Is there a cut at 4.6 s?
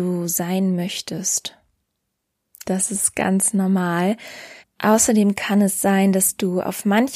yes; 2 cuts; at 2.5 s, 4.6 s

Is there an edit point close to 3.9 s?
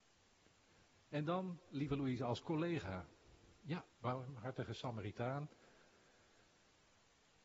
yes; 1 cut; at 3.9 s

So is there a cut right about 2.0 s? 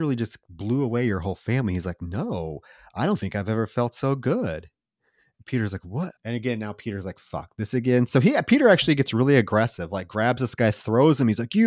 no; 1 cut; at 6.1 s

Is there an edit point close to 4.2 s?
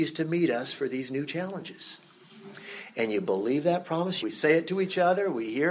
yes; 1 cut; at 4.2 s

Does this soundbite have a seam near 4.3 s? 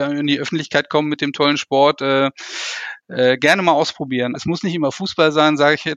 yes; 1 cut; at 4.3 s

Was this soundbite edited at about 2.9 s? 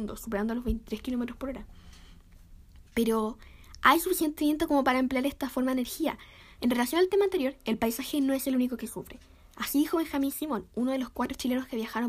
no; 1 cut; at 6.6 s

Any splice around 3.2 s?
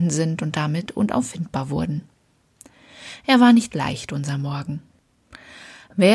no; 0 cuts

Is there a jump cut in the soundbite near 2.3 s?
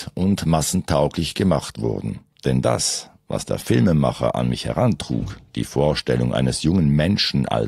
yes; 1 cut; at 2.3 s

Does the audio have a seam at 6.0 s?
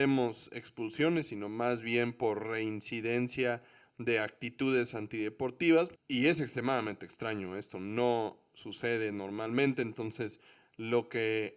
yes; 1 cut; at 6.0 s

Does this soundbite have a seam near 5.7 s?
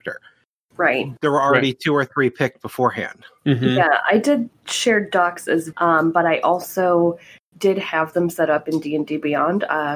yes; 1 cut; at 5.7 s

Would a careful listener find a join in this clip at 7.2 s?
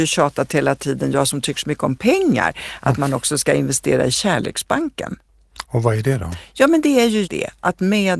yes; 1 cut; at 7.2 s

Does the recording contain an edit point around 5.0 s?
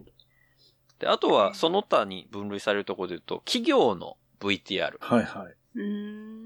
yes; 1 cut; at 5.0 s

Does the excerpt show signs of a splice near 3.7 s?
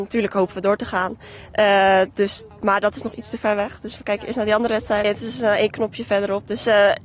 no; 2 cuts; at 2.5 s, 5.0 s

